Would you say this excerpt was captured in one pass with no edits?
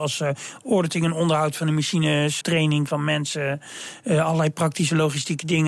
no; 1 cut; at 2.4 s

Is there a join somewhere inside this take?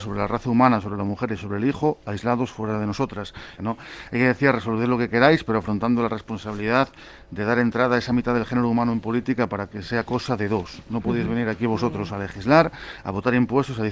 yes; 1 cut; at 3.6 s

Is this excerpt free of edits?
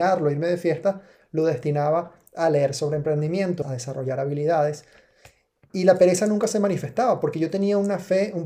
no; 1 cut; at 3.6 s

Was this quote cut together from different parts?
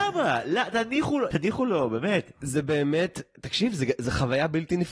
yes; 1 cut; at 1.3 s

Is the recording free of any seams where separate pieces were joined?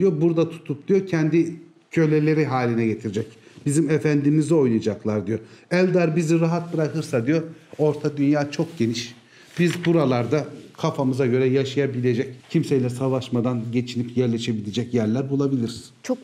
no; 1 cut; at 12.4 s

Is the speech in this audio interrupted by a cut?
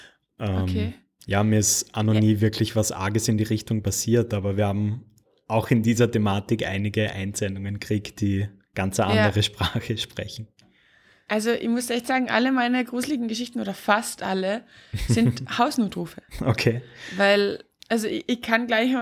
no; 0 cuts

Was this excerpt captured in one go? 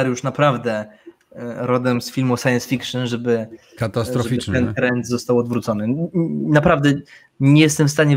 yes; 0 cuts

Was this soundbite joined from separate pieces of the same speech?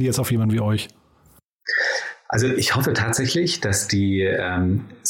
no; 0 cuts

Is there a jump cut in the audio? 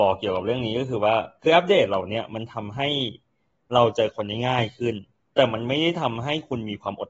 no; 0 cuts

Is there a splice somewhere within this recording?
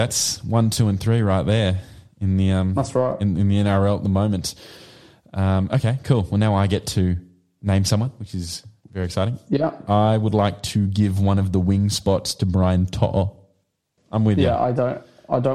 yes; 1 cut; at 14.0 s

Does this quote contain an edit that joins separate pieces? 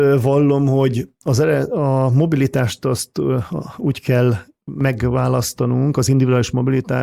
no; 0 cuts

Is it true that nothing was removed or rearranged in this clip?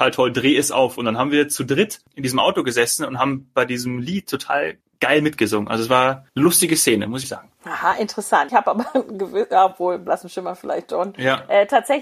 no; 2 cuts; at 7.2 s, 8.5 s

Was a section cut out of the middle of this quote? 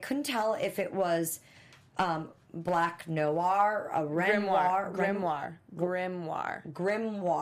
no; 0 cuts

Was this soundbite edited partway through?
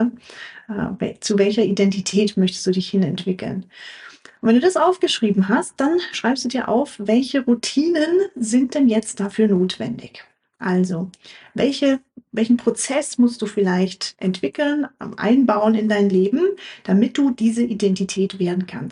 no; 0 cuts

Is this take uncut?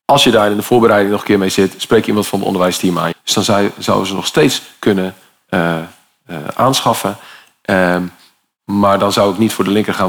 no; 1 cut; at 3.1 s

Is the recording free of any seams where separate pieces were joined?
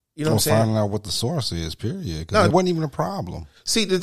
no; 1 cut; at 2.5 s

